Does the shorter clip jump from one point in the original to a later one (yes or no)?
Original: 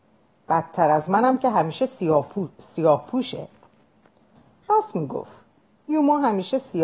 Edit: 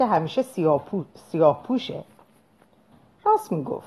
no